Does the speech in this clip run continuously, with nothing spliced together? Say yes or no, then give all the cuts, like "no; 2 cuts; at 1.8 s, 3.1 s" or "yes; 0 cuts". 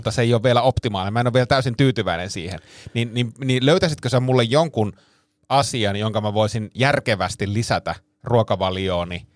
yes; 0 cuts